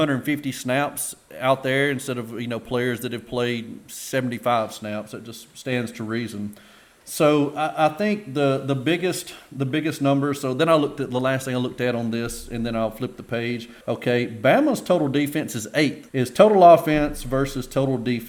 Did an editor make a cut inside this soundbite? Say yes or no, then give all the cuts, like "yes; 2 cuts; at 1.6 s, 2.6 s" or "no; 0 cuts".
yes; 2 cuts; at 13.8 s, 16.1 s